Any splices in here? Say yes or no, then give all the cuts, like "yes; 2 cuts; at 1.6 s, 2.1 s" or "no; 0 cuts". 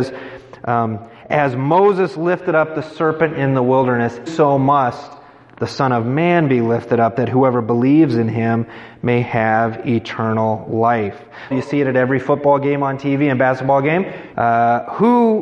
yes; 3 cuts; at 4.3 s, 11.5 s, 14.3 s